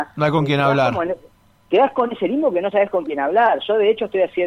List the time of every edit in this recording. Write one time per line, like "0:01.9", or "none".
none

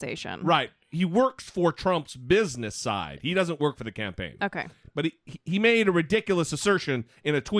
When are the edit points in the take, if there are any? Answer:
none

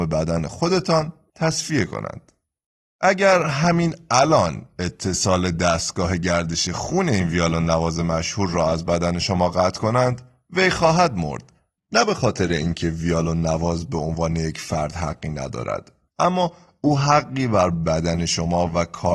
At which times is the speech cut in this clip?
0:11.8
0:16.1

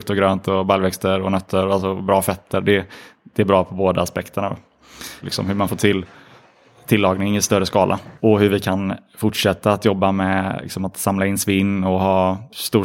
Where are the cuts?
0:05.2
0:08.2

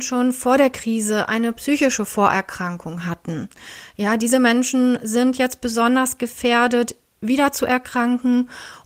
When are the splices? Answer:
none

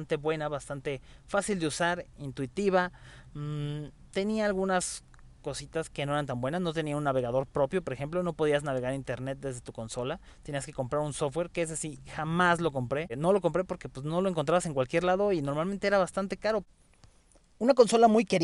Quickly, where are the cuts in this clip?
none

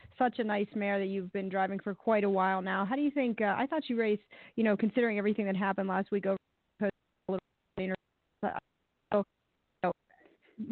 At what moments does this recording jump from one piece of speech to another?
none

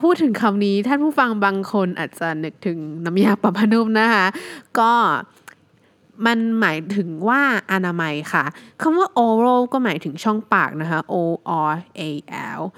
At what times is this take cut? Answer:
none

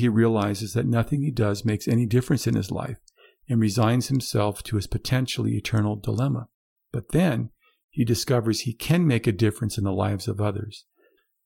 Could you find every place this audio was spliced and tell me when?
none

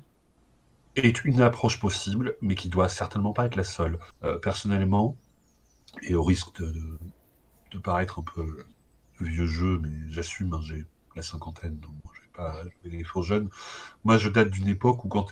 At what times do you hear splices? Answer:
none

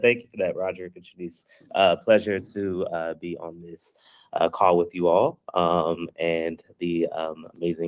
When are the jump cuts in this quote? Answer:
none

